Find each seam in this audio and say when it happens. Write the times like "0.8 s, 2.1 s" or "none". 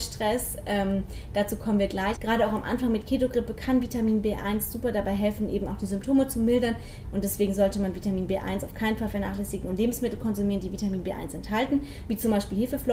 2.2 s, 7.0 s